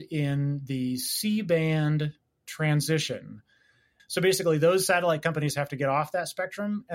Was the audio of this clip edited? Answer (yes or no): yes